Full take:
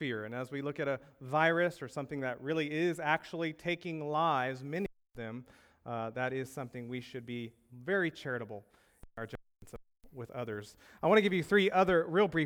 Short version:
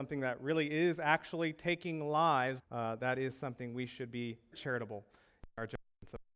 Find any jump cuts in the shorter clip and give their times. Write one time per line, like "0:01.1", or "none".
0:02.6
0:04.5